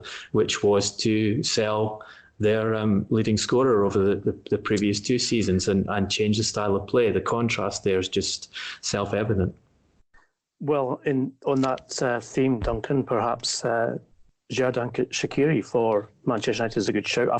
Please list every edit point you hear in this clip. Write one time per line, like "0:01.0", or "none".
none